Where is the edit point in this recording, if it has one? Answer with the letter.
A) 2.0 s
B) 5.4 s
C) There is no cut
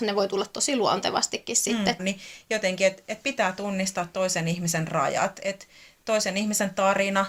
A